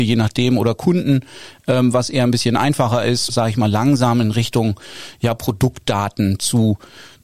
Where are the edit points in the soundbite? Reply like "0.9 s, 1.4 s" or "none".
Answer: 3.3 s